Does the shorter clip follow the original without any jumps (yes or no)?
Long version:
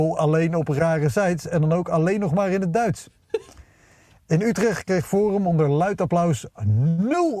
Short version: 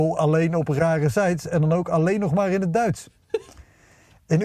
yes